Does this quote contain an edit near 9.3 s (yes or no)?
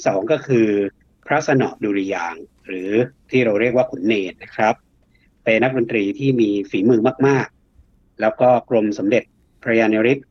no